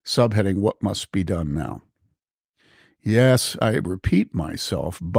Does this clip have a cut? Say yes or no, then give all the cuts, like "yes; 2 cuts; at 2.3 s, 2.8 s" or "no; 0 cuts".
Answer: no; 0 cuts